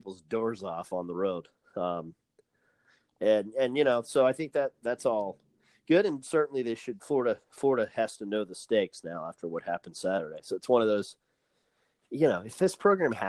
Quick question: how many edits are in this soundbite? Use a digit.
0